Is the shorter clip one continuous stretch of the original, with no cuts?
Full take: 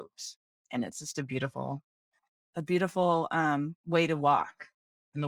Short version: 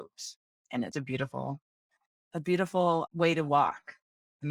no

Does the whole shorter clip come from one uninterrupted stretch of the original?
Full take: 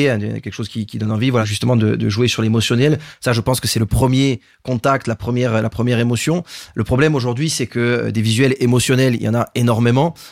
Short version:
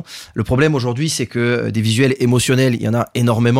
yes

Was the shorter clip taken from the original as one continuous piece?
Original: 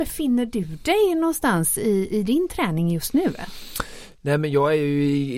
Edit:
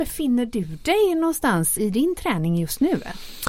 no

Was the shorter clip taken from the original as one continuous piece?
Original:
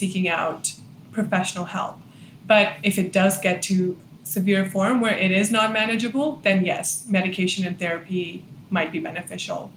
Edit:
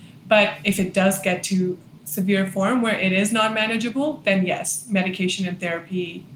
yes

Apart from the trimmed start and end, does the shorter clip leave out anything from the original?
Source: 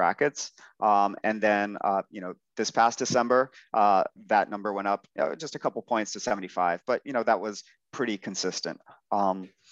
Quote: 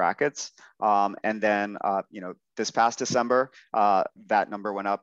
no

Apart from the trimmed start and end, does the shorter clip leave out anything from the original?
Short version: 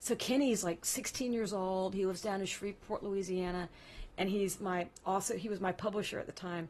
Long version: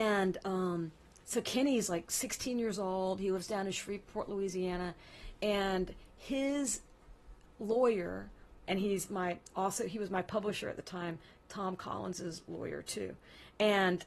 yes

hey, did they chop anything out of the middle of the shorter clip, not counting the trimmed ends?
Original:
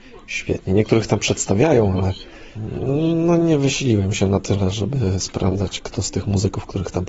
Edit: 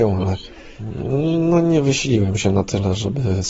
no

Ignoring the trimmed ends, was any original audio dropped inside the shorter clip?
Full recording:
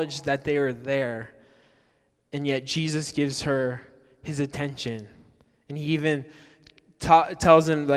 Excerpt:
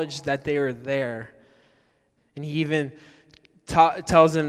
yes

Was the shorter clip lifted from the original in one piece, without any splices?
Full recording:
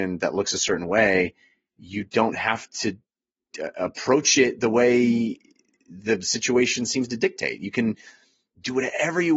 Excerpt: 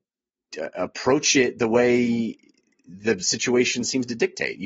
yes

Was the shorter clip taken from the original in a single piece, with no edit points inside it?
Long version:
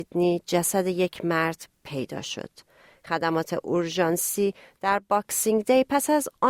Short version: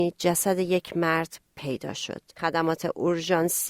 no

